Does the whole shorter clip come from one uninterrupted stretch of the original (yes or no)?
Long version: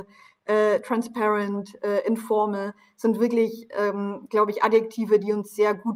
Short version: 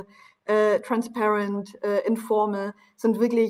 yes